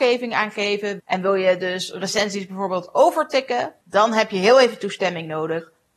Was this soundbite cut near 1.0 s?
yes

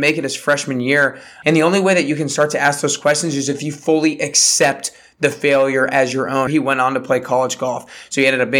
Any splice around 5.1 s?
no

